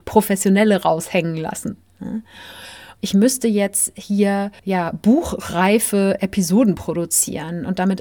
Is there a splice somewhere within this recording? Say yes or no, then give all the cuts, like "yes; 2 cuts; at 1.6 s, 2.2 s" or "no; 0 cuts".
yes; 2 cuts; at 3.0 s, 4.6 s